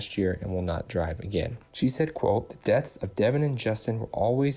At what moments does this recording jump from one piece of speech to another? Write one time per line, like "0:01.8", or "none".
0:01.7